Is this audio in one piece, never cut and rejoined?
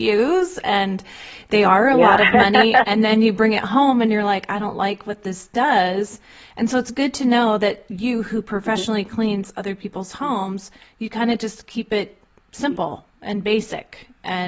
yes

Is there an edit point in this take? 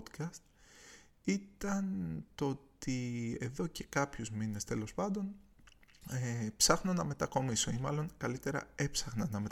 no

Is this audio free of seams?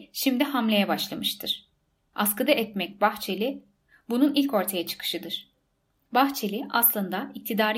yes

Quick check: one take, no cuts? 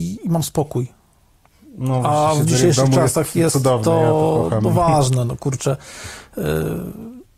yes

